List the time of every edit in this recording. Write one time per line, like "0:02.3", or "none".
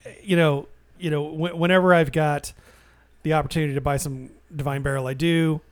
0:00.9